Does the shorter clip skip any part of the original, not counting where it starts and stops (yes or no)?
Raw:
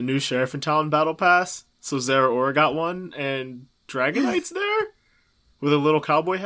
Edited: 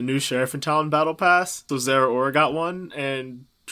yes